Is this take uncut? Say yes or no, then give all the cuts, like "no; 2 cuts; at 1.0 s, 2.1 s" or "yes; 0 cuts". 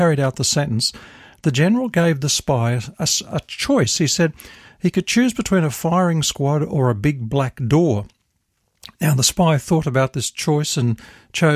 yes; 0 cuts